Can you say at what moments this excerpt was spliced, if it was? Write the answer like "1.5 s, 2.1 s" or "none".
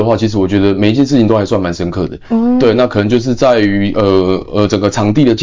none